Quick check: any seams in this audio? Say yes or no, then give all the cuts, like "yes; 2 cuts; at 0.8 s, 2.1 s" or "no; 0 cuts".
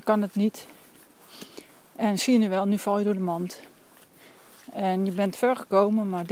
no; 0 cuts